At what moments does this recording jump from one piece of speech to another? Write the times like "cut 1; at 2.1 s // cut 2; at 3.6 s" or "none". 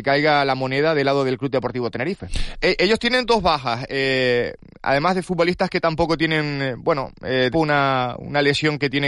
cut 1; at 2.5 s // cut 2; at 7.5 s